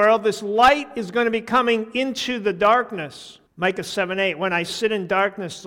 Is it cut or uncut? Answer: cut